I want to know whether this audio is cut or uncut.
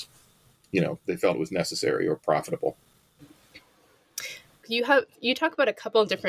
cut